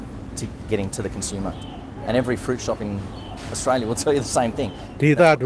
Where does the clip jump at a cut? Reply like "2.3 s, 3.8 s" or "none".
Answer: 0.9 s